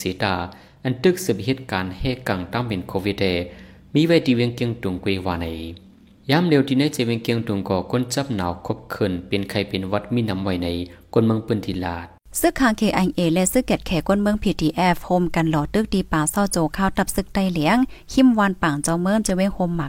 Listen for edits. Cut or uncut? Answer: uncut